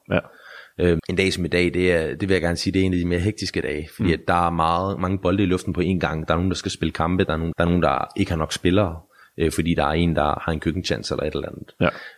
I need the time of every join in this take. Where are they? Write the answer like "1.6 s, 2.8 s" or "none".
1.0 s, 7.5 s